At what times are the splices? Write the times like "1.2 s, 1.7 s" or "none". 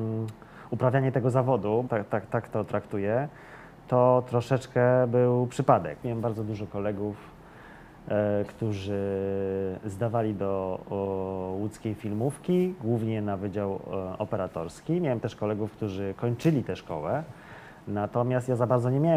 1.9 s, 6.0 s